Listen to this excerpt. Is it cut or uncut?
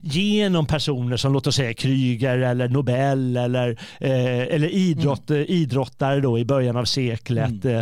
uncut